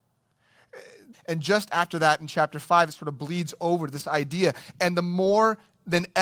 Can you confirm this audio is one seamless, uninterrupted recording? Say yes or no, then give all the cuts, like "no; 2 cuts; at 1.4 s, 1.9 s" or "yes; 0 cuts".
no; 1 cut; at 1.1 s